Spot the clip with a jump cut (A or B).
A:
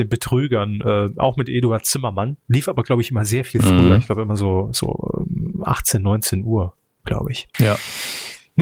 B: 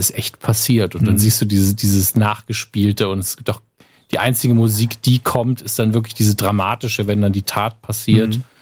A